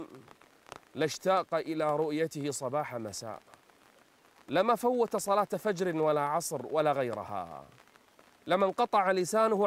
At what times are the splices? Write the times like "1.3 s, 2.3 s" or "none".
none